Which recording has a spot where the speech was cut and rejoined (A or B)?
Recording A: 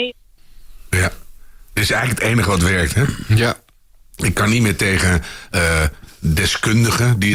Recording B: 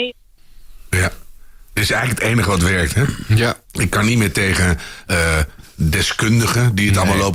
B